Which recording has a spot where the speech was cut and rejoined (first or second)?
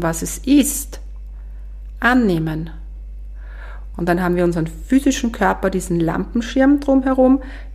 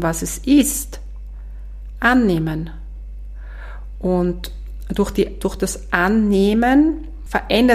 first